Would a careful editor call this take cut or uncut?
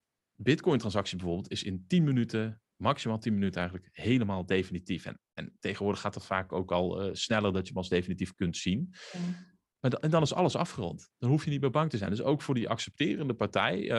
uncut